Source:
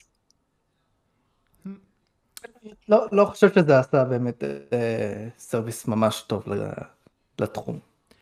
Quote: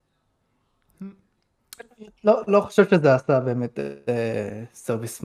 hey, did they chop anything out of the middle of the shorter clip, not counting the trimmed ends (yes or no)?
no